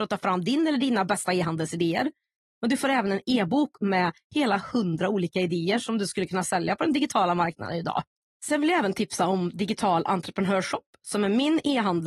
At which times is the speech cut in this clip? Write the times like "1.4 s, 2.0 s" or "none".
8.3 s